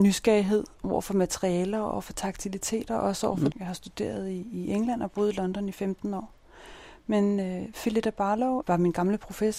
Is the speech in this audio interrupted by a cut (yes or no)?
yes